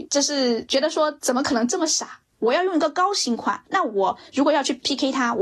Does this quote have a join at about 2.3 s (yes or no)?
yes